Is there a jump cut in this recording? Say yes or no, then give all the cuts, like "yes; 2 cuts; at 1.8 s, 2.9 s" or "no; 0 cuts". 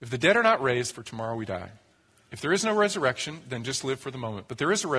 yes; 1 cut; at 0.9 s